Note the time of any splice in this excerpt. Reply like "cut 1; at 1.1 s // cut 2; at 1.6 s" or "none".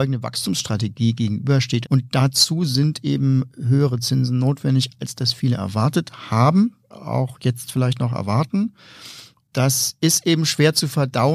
cut 1; at 1.8 s